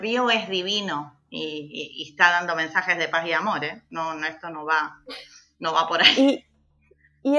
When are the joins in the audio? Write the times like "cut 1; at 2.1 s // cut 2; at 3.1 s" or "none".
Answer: none